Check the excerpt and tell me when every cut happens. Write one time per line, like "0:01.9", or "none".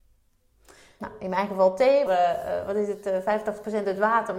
0:01.0
0:02.1